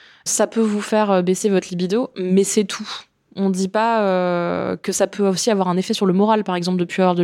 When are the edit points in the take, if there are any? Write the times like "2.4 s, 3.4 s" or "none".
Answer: none